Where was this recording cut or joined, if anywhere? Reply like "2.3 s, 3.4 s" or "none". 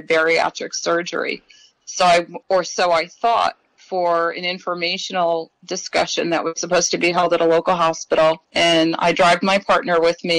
2.4 s, 8.4 s

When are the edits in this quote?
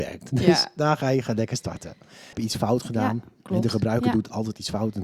2.3 s

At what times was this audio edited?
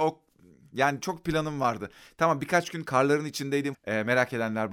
3.7 s

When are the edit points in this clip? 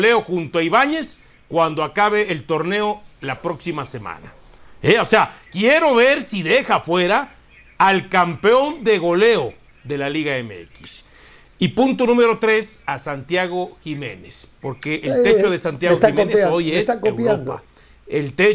14.5 s

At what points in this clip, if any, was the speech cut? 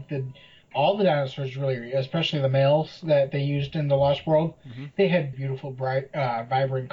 5.3 s

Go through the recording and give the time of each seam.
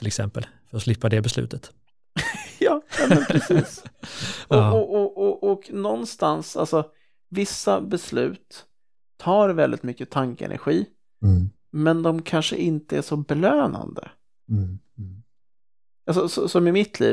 none

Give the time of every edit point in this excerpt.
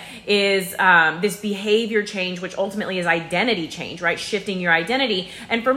none

